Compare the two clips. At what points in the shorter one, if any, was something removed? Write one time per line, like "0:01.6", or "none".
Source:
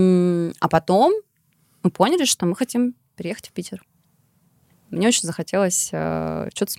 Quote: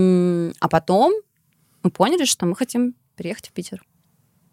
none

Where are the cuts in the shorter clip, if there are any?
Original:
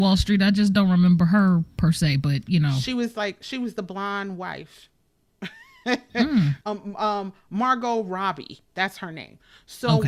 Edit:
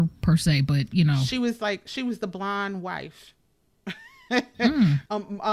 none

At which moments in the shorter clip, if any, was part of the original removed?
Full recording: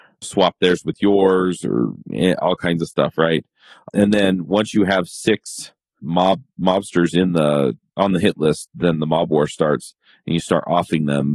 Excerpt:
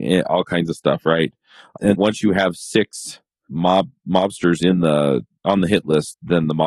0:01.9

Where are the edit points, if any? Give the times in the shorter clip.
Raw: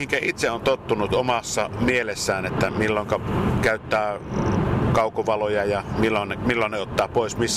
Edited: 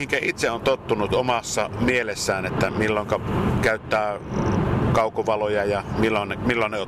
none

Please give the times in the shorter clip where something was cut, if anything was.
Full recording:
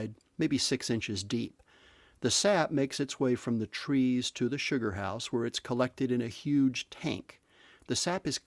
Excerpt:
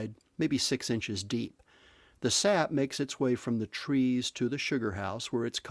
none

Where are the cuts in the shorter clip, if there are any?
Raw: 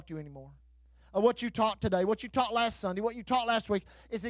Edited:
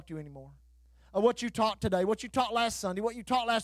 none

